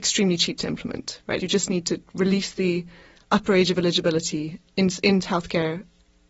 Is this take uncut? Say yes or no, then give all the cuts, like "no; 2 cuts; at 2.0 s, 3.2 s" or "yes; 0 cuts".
no; 1 cut; at 1.4 s